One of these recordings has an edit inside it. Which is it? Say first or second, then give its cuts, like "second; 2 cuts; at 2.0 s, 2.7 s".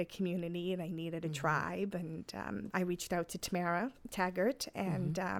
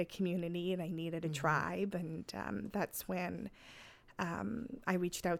first; 1 cut; at 2.7 s